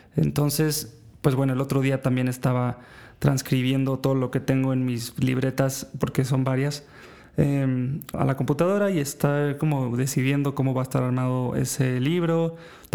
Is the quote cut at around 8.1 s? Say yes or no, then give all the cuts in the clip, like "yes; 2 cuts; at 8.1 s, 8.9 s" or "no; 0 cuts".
yes; 1 cut; at 8.1 s